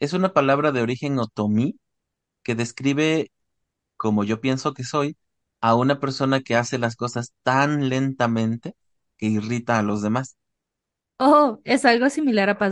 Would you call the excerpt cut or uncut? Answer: uncut